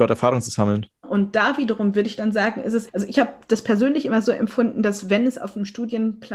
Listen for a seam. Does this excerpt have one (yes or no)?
yes